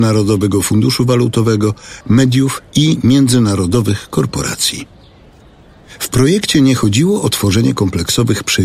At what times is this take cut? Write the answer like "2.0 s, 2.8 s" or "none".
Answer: 2.0 s

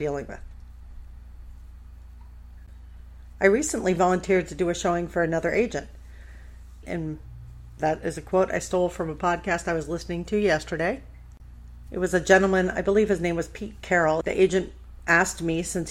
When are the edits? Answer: 6.8 s, 14.2 s

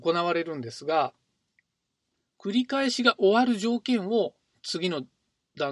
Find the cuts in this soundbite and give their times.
none

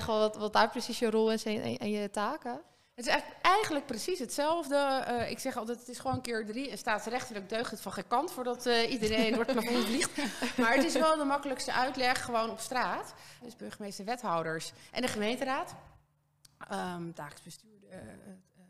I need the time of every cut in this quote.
9.3 s, 13.4 s

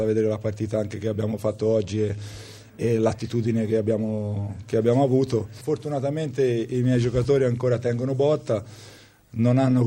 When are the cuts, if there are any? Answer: 5.6 s

